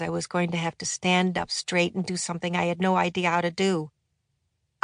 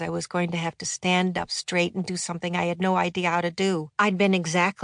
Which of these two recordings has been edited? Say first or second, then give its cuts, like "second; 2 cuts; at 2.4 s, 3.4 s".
second; 1 cut; at 3.9 s